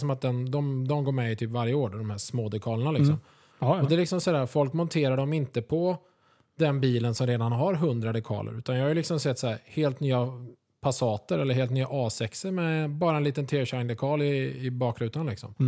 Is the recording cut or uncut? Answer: cut